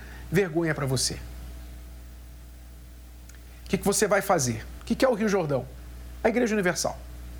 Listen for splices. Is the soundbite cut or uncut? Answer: cut